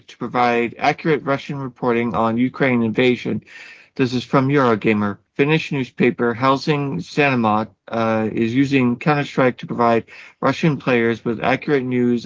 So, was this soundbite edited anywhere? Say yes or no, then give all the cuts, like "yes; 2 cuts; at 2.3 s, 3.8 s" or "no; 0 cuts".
yes; 1 cut; at 5.3 s